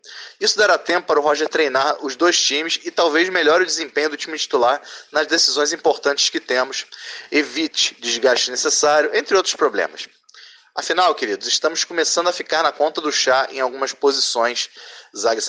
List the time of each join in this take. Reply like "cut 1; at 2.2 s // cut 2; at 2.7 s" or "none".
none